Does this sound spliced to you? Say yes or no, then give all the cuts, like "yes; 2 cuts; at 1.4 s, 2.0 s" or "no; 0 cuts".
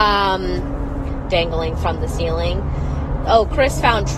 yes; 2 cuts; at 1.3 s, 3.2 s